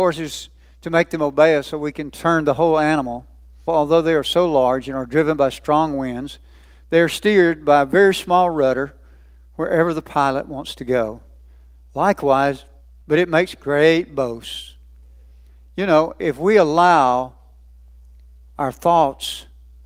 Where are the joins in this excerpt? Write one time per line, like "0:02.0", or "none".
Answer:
0:03.7
0:13.0

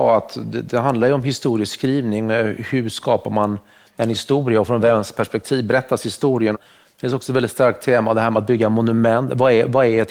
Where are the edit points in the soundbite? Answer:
0:06.5

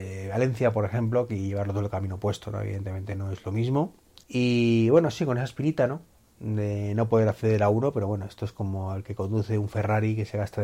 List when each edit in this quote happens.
0:04.2

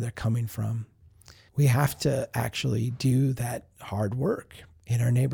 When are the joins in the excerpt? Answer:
0:01.5

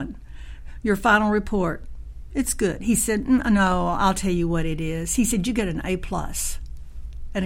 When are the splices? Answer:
0:02.3

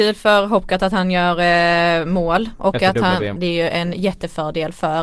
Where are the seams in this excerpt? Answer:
0:03.4

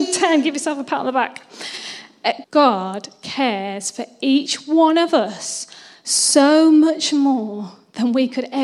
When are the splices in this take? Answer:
0:02.4

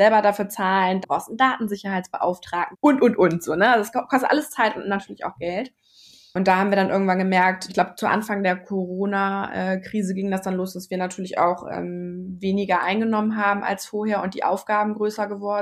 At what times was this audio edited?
0:01.0
0:02.7
0:07.7

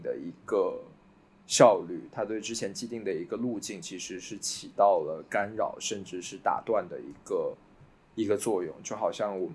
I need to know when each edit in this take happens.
none

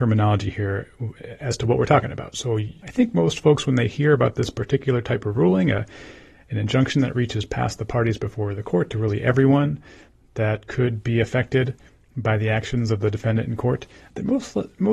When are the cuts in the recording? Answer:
none

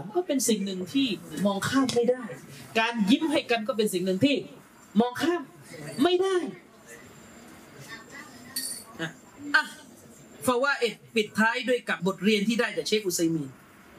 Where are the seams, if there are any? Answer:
0:12.0

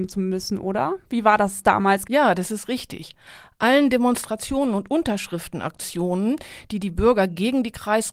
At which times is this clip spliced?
0:02.0

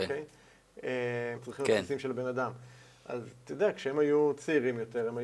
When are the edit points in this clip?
0:01.4

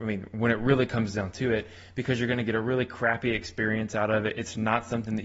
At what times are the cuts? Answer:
none

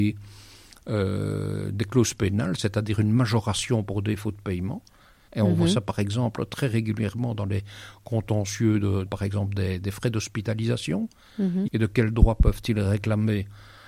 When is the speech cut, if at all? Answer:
0:05.3
0:09.1
0:11.7

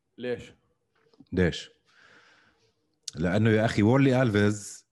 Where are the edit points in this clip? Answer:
none

